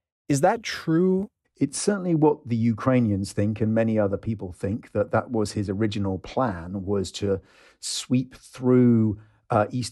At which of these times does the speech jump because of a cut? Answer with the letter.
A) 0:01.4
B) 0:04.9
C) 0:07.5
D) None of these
A